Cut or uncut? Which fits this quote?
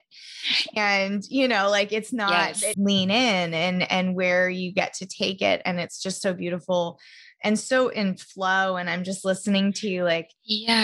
cut